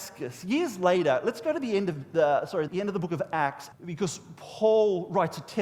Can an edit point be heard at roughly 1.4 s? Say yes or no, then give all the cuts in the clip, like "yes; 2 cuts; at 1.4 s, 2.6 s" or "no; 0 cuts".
no; 2 cuts; at 2.7 s, 3.7 s